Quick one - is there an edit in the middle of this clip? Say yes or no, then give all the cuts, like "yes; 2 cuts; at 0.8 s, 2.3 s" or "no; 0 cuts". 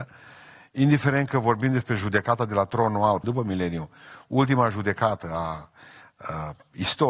yes; 1 cut; at 3.2 s